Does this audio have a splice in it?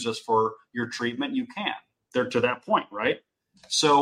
yes; 1 cut; at 2.0 s

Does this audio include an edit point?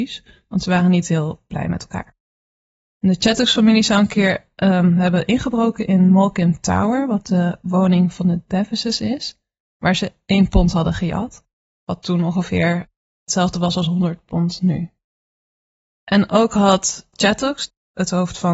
no; 0 cuts

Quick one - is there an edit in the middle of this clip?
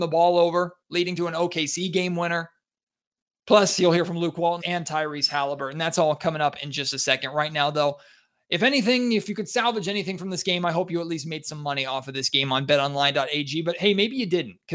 yes; 1 cut; at 4.6 s

